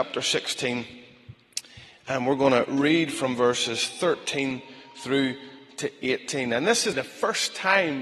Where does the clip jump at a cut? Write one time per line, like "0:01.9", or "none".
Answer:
0:06.9